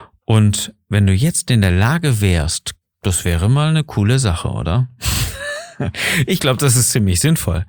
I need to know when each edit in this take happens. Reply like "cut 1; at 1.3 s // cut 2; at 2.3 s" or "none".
cut 1; at 2.8 s